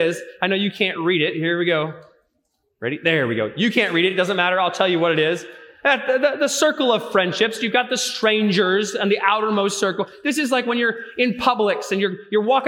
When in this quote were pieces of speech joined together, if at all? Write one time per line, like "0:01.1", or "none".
none